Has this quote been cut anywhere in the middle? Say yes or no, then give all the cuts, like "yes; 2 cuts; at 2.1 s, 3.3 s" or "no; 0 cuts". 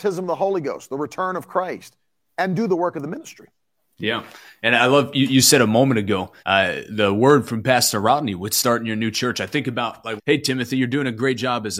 yes; 2 cuts; at 6.4 s, 10.2 s